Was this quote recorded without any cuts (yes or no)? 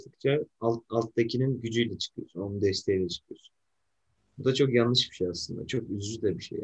yes